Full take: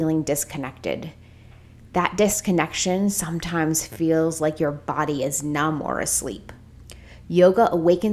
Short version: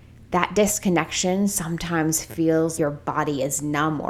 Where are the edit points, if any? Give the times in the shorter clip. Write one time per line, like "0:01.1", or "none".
0:02.8